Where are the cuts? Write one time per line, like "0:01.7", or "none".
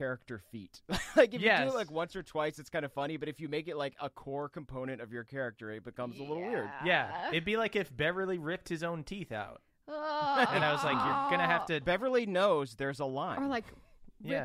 none